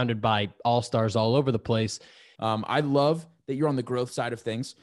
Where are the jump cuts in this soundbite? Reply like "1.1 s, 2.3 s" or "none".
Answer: 2.3 s